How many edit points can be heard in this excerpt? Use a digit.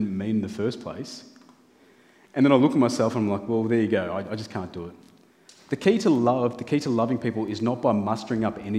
0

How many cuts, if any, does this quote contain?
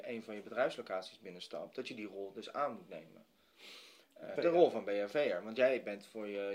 1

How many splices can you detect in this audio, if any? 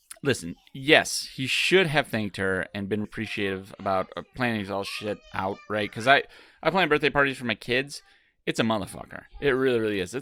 1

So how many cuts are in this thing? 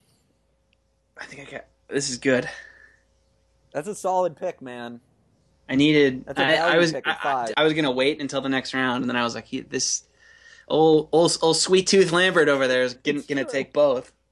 2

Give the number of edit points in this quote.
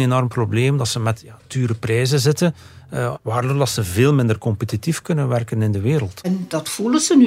2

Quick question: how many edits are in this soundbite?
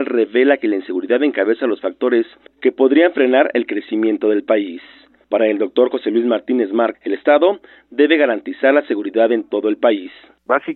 1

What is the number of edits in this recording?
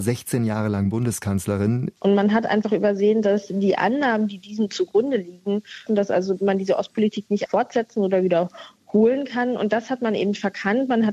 3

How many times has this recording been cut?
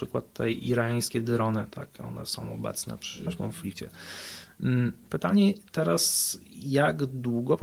1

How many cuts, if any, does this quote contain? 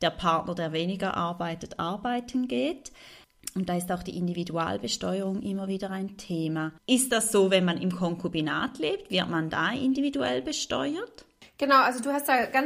1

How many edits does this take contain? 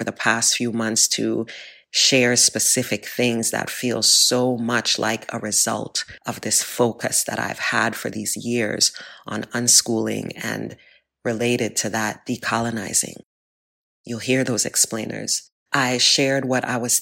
1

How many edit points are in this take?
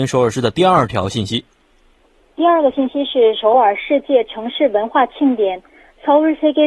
0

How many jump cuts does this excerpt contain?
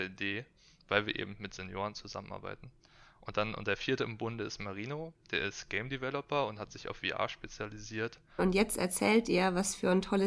1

